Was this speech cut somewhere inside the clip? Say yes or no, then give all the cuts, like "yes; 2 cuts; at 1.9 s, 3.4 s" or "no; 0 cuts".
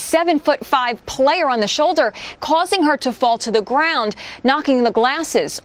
yes; 1 cut; at 2.4 s